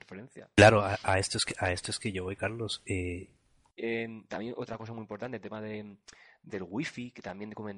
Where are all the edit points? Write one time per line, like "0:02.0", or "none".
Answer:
0:03.8
0:06.5